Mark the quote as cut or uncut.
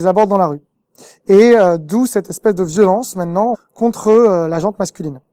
cut